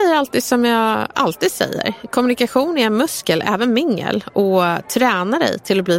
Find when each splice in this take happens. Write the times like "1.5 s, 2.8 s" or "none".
none

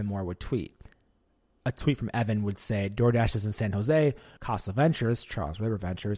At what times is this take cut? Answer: 4.4 s

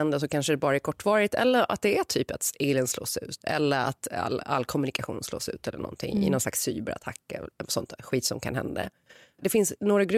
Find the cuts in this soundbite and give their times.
none

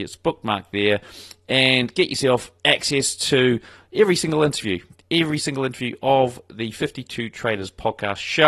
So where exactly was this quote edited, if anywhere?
none

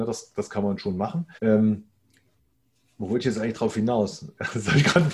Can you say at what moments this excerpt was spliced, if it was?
1.4 s

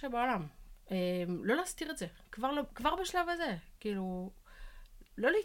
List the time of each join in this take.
none

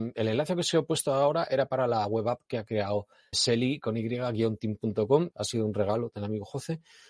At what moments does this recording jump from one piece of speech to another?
3.3 s, 5.3 s

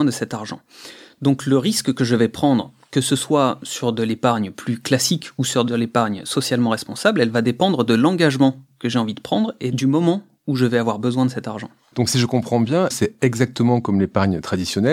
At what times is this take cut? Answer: 12.9 s

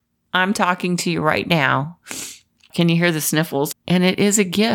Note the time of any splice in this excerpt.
2.7 s, 3.7 s

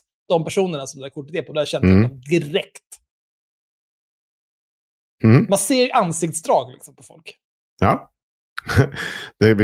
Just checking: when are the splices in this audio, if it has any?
none

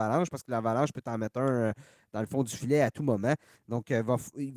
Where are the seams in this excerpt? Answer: none

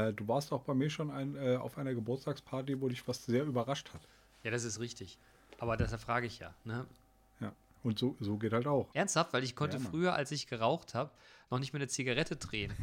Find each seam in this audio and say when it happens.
8.9 s

